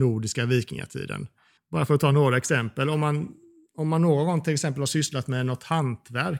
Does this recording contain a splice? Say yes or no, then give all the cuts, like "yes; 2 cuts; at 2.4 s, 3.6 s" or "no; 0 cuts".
yes; 1 cut; at 1.6 s